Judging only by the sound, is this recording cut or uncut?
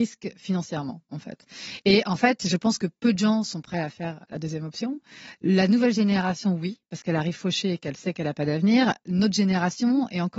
uncut